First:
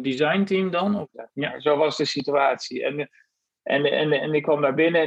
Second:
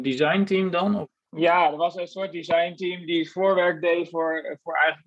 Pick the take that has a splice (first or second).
first